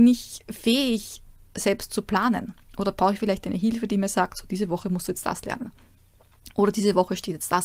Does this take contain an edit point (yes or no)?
no